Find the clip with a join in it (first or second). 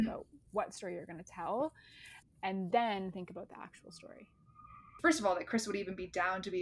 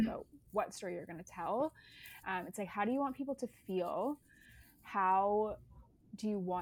first